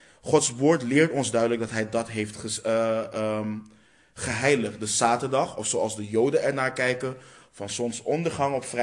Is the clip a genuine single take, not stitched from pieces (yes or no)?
yes